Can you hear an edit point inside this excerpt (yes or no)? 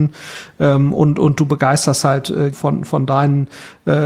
yes